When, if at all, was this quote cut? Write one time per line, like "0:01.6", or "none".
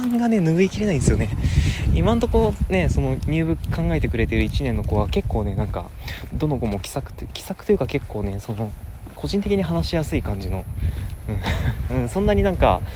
0:11.9